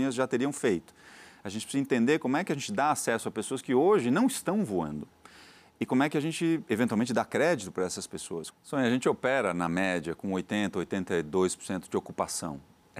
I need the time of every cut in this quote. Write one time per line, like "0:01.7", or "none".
0:08.5